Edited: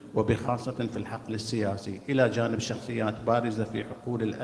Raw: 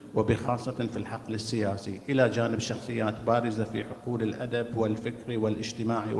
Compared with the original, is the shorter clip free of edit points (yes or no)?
yes